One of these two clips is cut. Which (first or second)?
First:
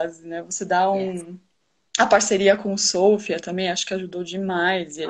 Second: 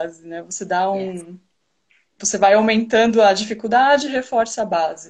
first